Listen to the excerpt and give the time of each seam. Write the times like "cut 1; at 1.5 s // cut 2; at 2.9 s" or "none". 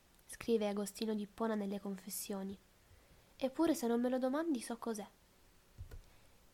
none